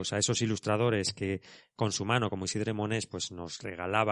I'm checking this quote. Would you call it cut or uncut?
uncut